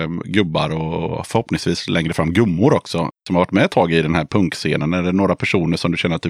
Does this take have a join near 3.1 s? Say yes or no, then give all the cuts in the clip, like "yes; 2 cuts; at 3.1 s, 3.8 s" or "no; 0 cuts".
no; 0 cuts